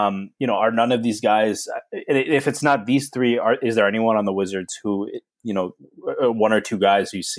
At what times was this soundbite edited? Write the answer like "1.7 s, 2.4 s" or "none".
none